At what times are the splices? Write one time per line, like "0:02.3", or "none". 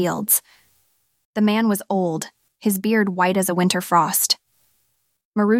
0:01.2